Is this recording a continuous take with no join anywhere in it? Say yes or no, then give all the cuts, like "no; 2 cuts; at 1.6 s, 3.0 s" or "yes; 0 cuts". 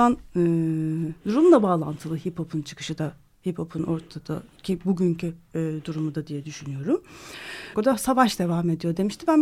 no; 1 cut; at 7.7 s